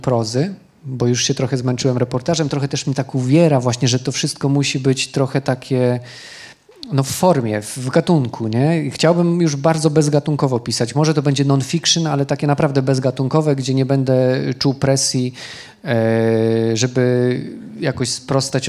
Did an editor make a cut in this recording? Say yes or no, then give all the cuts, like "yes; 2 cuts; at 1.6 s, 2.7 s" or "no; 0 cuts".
no; 0 cuts